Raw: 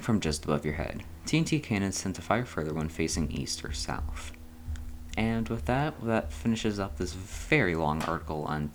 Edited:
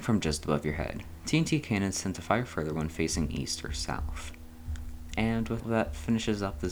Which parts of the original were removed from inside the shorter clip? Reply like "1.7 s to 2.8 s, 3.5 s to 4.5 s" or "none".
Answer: 5.6 s to 6.0 s